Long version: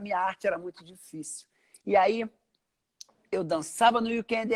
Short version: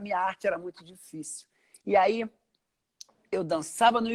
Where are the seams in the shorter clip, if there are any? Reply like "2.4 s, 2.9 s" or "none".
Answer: none